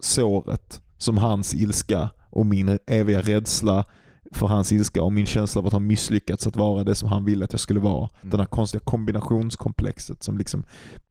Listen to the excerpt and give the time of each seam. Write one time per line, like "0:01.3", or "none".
none